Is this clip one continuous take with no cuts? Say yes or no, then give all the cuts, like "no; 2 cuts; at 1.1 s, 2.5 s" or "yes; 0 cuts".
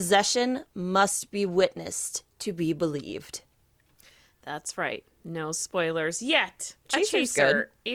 no; 1 cut; at 6.9 s